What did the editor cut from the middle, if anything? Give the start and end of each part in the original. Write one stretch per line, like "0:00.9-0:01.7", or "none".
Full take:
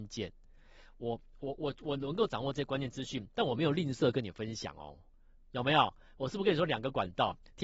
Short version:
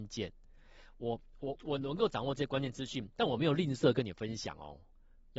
0:01.6-0:01.7